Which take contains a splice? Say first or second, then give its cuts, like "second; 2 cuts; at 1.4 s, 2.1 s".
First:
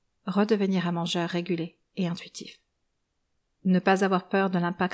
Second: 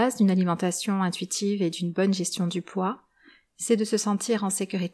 first; 1 cut; at 3.5 s